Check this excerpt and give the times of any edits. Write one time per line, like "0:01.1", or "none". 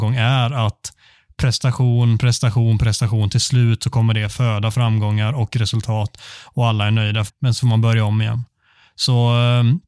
0:07.3